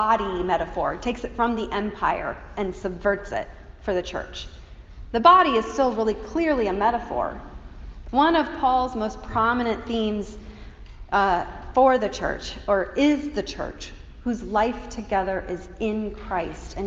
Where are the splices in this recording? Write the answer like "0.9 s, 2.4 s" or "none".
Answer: 8.0 s